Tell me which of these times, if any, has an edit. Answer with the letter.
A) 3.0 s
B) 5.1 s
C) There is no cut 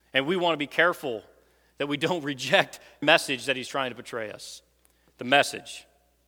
A